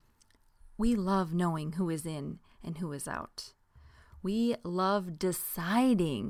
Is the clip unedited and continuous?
yes; 0 cuts

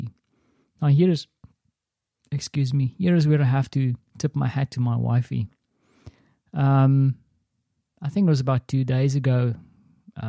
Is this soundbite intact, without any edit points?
yes; 0 cuts

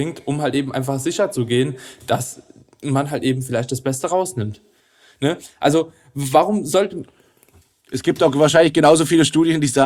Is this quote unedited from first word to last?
yes; 0 cuts

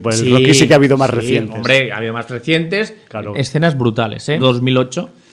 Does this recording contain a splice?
yes; 2 cuts; at 3.3 s, 4.4 s

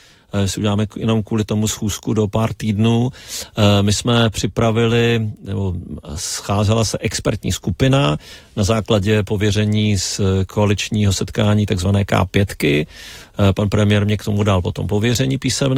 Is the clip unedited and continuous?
yes; 0 cuts

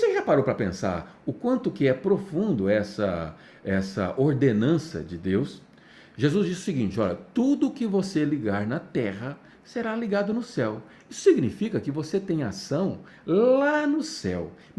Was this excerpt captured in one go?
yes; 0 cuts

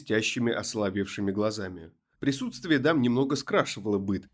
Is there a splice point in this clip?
yes; 1 cut; at 2.2 s

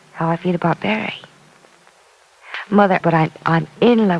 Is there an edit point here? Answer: yes; 1 cut; at 3.0 s

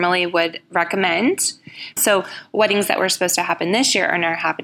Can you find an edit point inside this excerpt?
yes; 1 cut; at 2.0 s

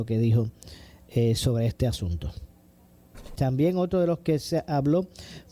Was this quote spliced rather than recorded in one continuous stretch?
yes; 1 cut; at 3.4 s

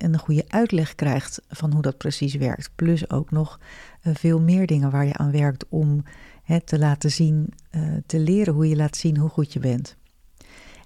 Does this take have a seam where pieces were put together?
no; 0 cuts

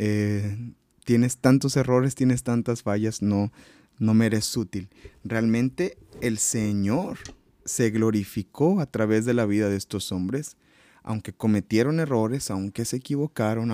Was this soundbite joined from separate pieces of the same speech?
no; 0 cuts

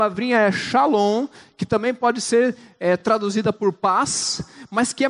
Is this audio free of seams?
yes; 0 cuts

